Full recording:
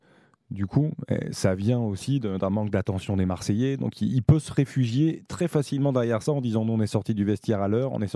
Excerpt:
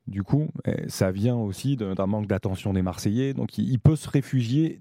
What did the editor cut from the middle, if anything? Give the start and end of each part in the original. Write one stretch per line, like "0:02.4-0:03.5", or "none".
none

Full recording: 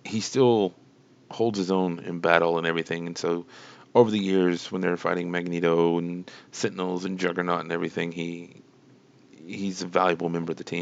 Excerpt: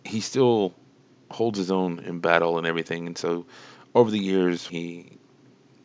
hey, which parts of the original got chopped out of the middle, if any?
0:04.7-0:08.1

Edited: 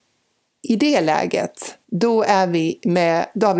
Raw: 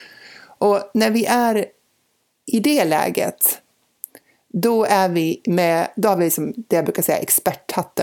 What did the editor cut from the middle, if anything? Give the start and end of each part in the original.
0:03.7-0:04.4

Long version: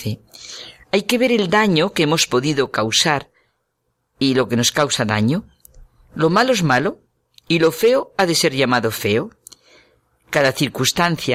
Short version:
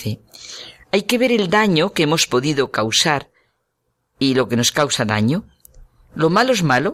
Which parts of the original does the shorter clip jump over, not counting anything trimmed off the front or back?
none

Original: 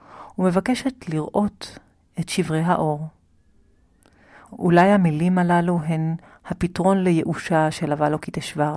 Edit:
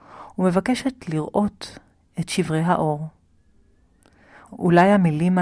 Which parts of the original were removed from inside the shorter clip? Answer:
none

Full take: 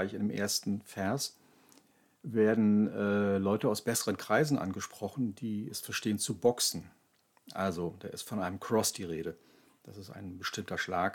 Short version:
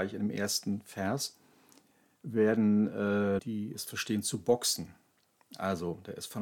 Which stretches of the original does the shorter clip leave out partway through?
0:03.4-0:05.3

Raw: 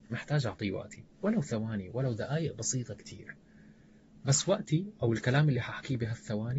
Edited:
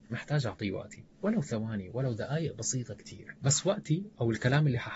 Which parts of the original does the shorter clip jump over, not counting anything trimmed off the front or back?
0:03.4-0:04.2

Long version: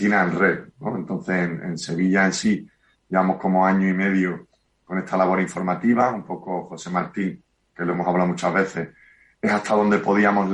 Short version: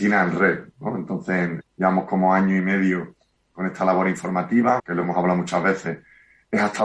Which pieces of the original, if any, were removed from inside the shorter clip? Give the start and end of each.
0:01.6-0:02.9
0:06.1-0:07.7

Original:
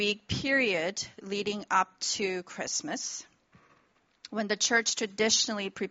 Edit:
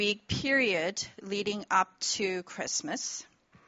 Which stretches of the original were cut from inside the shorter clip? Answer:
none

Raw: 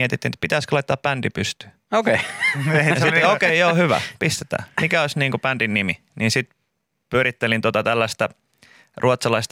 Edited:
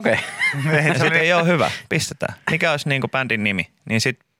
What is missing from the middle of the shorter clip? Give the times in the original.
0:03.2-0:03.5

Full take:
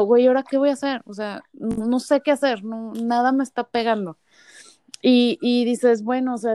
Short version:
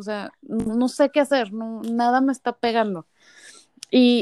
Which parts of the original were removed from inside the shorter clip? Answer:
none

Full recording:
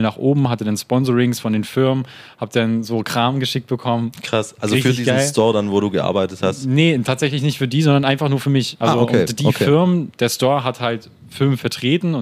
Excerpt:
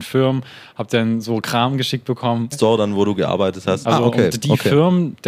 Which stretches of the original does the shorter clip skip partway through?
0:04.1-0:05.3
0:06.6-0:08.8

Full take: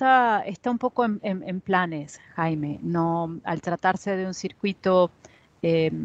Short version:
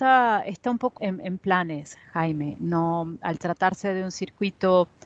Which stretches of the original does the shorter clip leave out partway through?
0:01.0-0:01.2

